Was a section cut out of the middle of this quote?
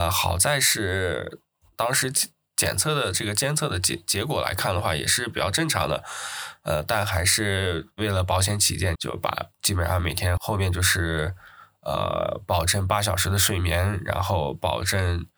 yes; 2 cuts; at 9.0 s, 10.4 s

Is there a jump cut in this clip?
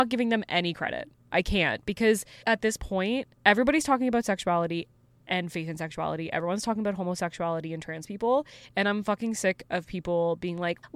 yes; 1 cut; at 3.3 s

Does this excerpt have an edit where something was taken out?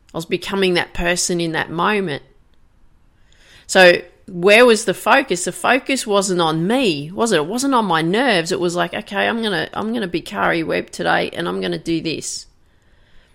no; 0 cuts

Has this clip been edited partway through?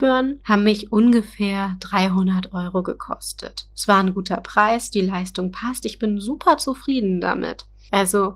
no; 0 cuts

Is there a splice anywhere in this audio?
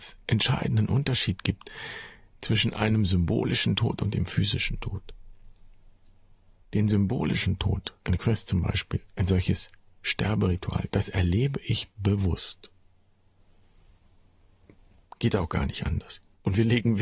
no; 0 cuts

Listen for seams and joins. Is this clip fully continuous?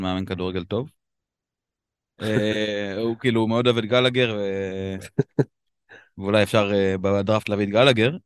yes; 0 cuts

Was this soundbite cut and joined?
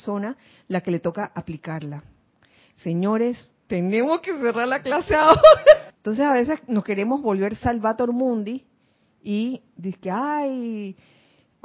yes; 1 cut; at 5.9 s

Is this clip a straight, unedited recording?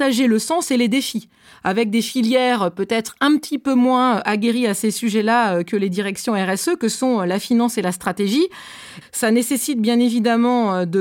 no; 1 cut; at 9.0 s

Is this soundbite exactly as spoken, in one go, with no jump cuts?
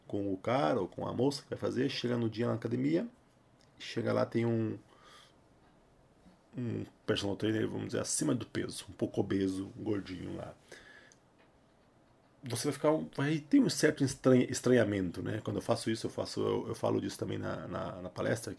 yes; 0 cuts

